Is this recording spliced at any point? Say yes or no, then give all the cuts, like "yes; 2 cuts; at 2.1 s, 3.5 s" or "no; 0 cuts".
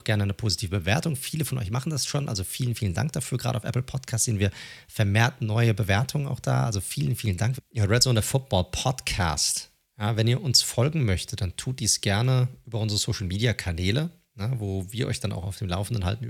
yes; 1 cut; at 7.6 s